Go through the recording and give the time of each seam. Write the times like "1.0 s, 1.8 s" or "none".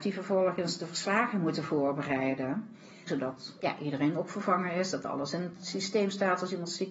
3.1 s